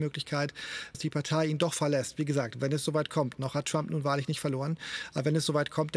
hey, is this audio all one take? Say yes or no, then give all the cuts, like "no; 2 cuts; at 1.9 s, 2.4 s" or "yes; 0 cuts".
no; 1 cut; at 0.9 s